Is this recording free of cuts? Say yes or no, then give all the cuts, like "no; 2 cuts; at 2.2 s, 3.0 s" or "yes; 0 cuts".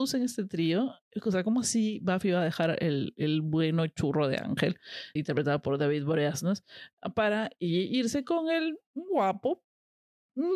no; 1 cut; at 5.2 s